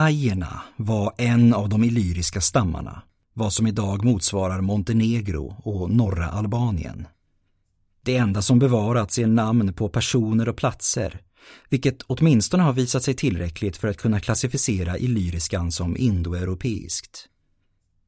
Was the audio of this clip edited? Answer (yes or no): yes